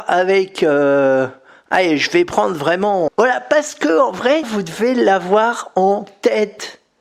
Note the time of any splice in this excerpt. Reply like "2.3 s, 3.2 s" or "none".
3.1 s, 4.4 s